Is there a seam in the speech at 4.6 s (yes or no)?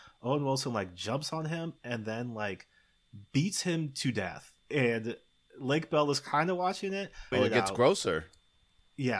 yes